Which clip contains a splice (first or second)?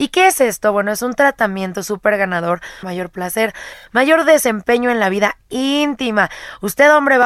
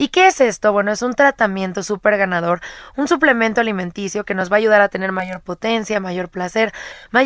first